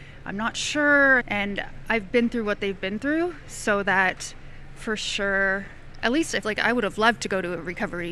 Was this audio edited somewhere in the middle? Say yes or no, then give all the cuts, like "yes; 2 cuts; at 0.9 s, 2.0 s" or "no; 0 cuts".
yes; 2 cuts; at 1.2 s, 6.4 s